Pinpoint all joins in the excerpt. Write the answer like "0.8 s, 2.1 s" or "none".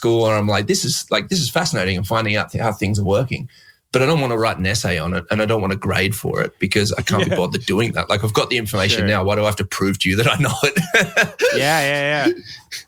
none